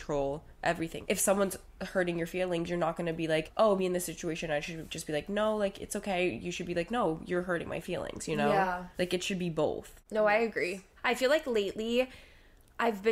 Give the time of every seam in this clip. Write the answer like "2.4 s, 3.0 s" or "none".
3.8 s